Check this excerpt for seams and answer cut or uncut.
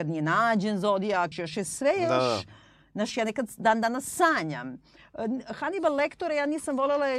cut